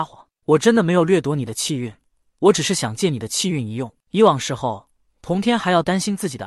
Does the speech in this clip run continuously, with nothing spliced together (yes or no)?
no